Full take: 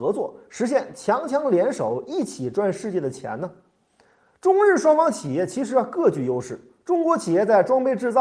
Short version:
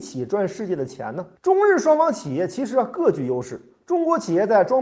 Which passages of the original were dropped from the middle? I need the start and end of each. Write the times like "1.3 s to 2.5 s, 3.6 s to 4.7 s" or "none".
3.6 s to 4.3 s